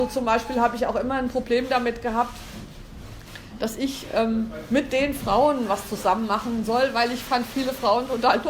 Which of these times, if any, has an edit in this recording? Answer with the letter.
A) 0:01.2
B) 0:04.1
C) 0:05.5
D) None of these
D